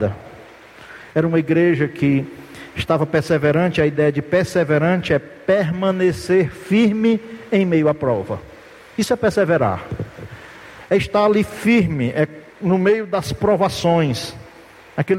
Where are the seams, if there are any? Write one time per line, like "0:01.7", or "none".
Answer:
0:12.5